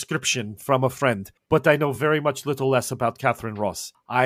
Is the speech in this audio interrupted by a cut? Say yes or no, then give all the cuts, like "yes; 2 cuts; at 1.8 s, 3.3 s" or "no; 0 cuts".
no; 0 cuts